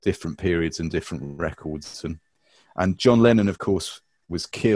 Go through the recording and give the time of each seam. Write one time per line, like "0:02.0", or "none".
none